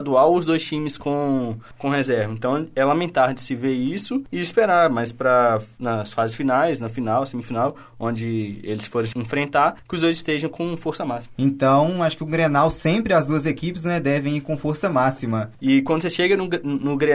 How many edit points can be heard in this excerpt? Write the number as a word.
two